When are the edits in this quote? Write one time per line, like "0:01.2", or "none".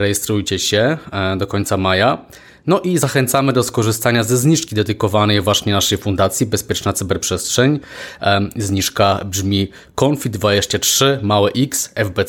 none